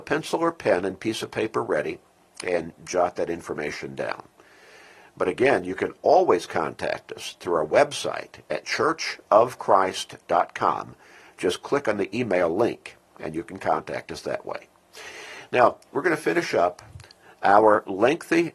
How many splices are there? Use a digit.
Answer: 0